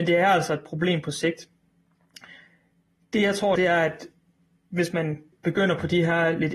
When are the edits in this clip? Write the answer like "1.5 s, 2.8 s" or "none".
3.6 s, 5.3 s